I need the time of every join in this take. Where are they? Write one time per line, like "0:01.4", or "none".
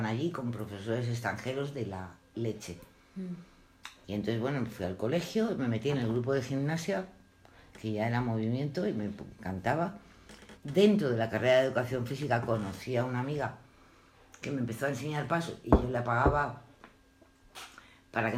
0:04.0
0:10.6